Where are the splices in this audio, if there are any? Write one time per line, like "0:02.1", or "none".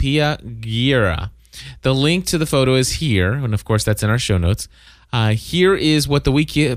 none